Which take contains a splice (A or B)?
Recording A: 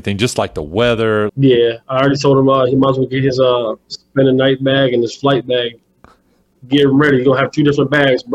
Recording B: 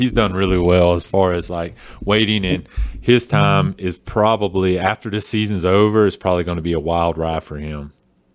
A